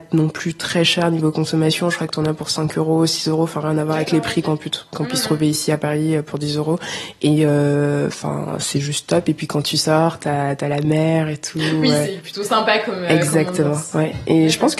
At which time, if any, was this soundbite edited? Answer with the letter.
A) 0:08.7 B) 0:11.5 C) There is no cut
C